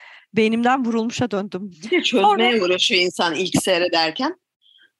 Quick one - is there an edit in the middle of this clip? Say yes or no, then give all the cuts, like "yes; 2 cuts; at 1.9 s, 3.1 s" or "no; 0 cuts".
yes; 1 cut; at 1.7 s